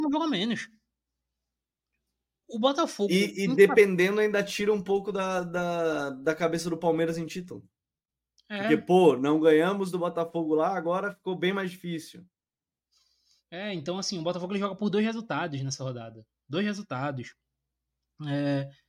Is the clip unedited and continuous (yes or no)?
yes